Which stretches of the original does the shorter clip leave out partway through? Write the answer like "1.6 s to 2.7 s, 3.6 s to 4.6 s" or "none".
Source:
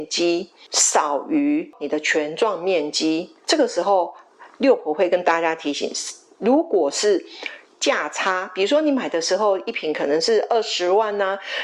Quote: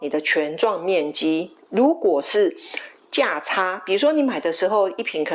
3.4 s to 6.3 s